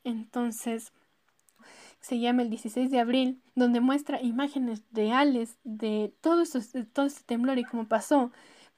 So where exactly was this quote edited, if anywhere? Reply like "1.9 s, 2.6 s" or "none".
1.6 s, 3.5 s